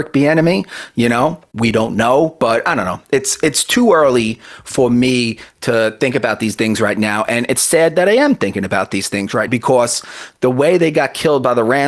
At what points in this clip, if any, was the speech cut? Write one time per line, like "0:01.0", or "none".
0:09.5